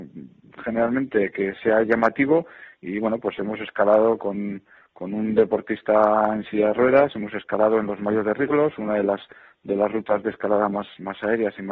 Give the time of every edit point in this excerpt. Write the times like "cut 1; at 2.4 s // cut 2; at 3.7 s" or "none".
none